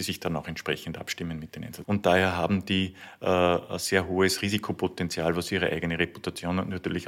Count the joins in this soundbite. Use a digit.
1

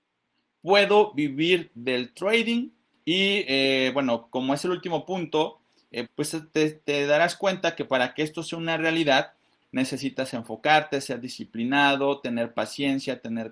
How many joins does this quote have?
3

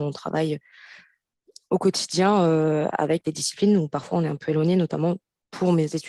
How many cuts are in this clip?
0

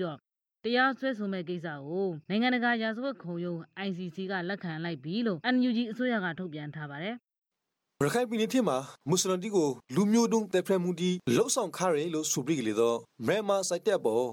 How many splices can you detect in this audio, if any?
0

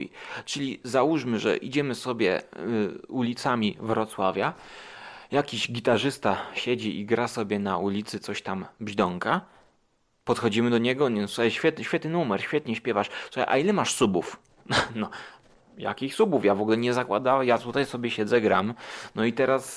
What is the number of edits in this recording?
0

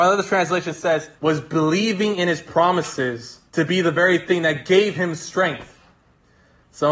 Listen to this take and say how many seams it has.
2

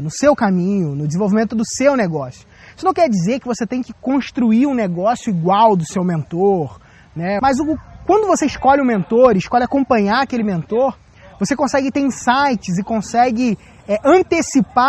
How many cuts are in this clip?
1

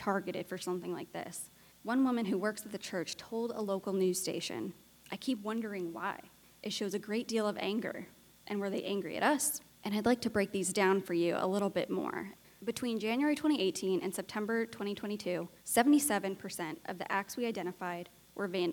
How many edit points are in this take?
2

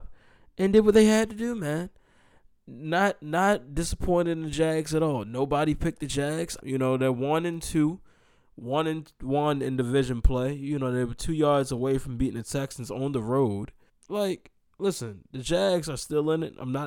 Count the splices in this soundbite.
2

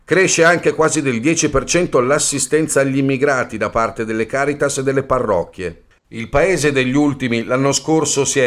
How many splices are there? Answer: 1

